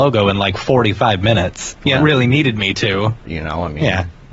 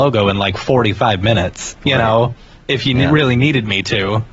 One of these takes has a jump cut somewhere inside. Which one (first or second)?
first